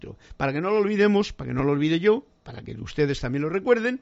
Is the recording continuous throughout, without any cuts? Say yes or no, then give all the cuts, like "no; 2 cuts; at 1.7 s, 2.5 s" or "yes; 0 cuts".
no; 1 cut; at 2.4 s